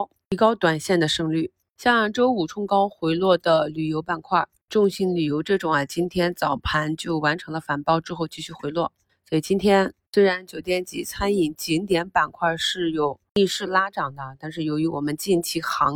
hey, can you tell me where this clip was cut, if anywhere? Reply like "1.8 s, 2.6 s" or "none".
9.1 s